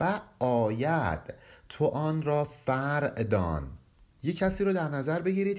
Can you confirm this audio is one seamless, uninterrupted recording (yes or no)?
yes